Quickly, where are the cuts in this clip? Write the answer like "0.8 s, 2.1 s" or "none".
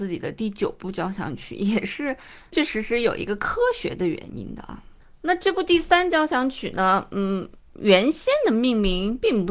2.5 s